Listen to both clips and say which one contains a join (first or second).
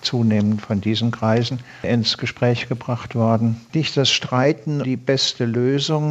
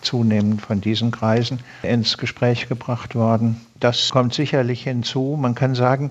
first